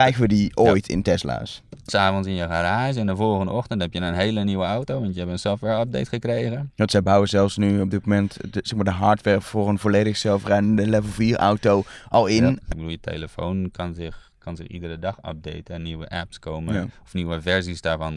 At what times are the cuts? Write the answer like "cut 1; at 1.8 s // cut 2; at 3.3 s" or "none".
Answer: cut 1; at 1.9 s // cut 2; at 12.7 s